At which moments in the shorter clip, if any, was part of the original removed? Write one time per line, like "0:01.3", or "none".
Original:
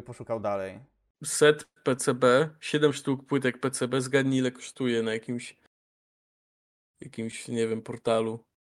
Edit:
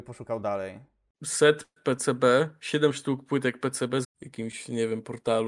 0:04.0